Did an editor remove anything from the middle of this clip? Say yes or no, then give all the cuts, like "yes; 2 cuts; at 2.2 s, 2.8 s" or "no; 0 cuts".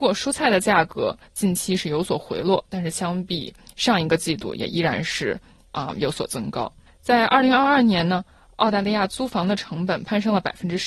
yes; 1 cut; at 6.9 s